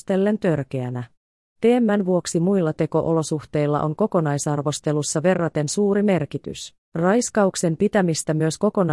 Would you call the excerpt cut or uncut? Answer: cut